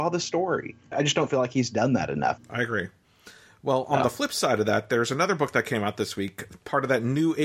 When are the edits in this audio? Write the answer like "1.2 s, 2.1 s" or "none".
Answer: 0.9 s, 2.4 s